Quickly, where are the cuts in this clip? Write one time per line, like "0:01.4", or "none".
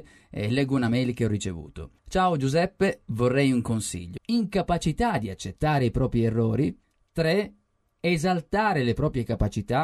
0:02.0
0:04.2